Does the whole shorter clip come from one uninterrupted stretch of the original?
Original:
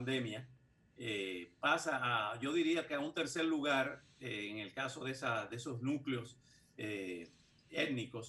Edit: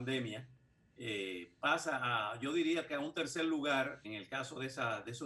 no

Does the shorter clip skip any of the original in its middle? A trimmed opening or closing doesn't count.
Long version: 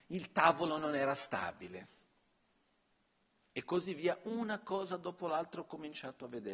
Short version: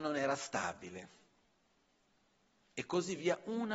no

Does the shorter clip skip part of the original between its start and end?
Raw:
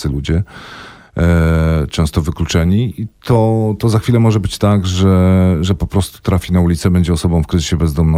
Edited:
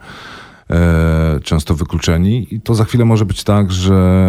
yes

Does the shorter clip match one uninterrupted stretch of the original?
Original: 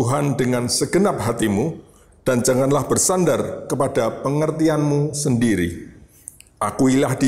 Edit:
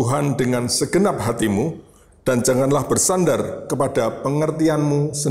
yes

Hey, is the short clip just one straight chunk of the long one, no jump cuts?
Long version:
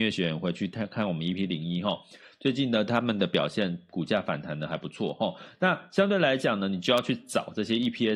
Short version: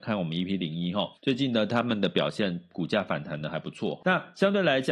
no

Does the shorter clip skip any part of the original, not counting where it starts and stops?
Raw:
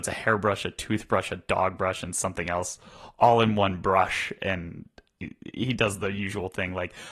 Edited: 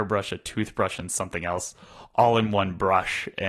yes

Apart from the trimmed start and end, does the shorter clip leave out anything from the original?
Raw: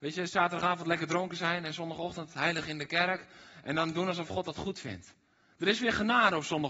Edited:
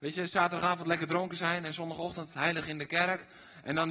no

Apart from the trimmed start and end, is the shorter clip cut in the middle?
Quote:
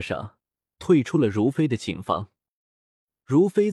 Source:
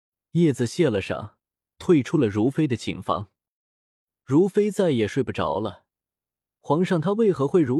no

